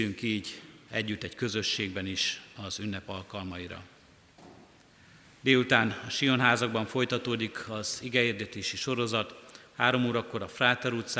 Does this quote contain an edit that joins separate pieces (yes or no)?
no